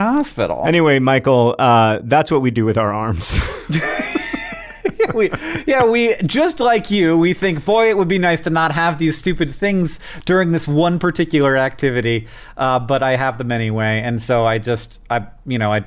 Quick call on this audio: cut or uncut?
uncut